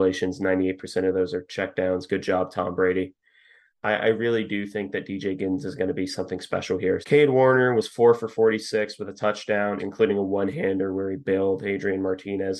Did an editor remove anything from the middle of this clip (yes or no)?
yes